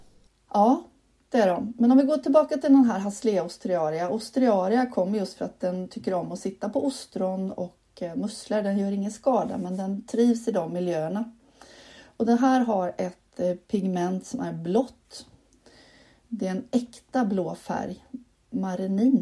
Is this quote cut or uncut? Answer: uncut